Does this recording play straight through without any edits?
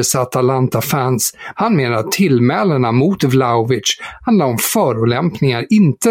no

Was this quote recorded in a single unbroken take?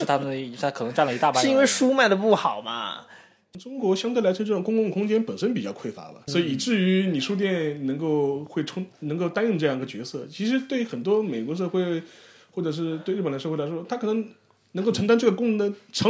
no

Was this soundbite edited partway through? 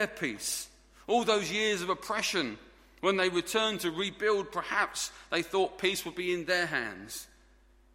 no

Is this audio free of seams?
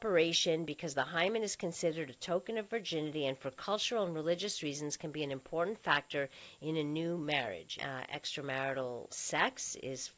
no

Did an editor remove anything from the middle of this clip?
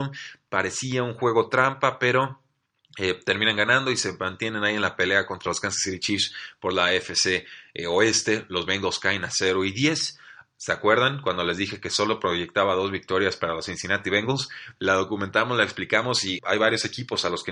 yes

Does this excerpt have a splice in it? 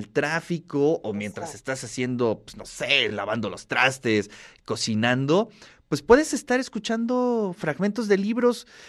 no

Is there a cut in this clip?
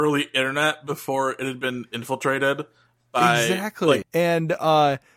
yes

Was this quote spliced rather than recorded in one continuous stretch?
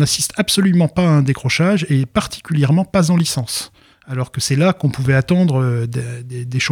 no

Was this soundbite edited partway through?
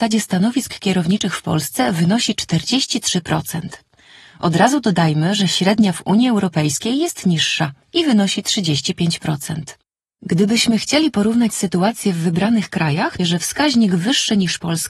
yes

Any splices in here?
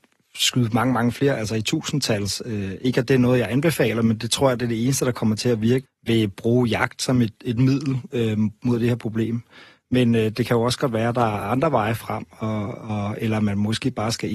yes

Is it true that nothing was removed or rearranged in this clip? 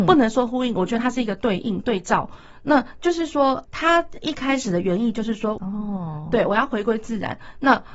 no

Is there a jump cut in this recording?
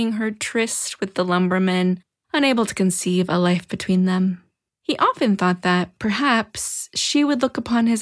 yes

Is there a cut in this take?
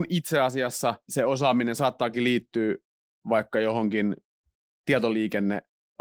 yes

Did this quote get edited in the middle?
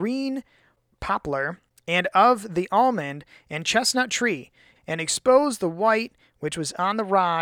yes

